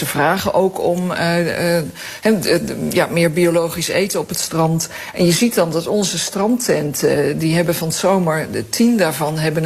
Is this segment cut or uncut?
uncut